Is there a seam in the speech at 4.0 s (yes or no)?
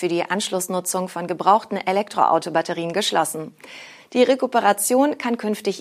yes